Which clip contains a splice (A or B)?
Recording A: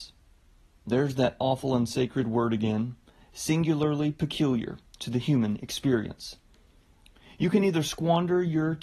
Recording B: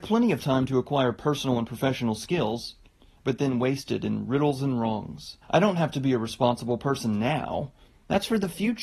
B